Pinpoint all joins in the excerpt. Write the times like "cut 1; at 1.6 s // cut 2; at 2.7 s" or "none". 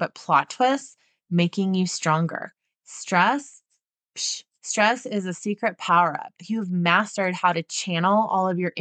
cut 1; at 4.5 s